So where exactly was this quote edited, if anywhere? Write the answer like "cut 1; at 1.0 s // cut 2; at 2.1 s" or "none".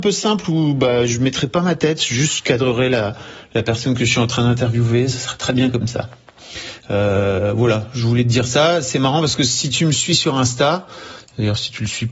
none